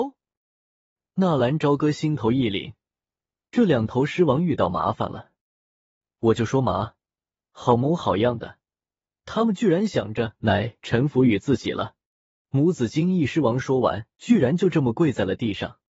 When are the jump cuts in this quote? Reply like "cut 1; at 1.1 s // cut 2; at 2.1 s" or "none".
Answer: cut 1; at 12.4 s // cut 2; at 14.1 s